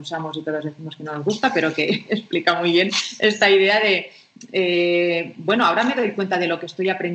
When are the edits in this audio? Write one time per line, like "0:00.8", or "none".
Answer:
none